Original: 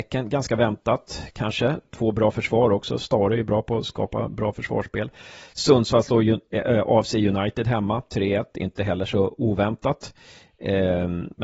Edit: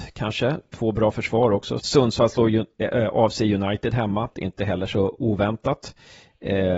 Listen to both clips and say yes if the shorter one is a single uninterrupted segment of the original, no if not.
no